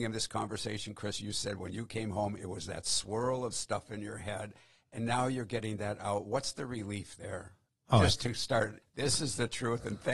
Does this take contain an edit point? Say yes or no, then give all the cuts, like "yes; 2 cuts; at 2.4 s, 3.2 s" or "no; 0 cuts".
yes; 1 cut; at 8.8 s